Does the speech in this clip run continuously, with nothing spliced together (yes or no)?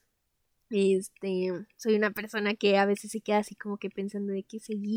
yes